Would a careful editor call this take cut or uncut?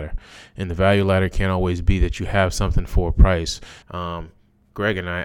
cut